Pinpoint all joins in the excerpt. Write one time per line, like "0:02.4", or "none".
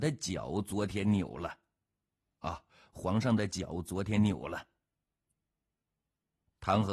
none